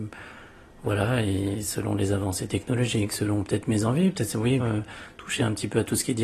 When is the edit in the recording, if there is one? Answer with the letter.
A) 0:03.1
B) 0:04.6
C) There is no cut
B